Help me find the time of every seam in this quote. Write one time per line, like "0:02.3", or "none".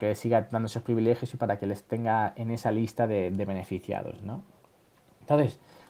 none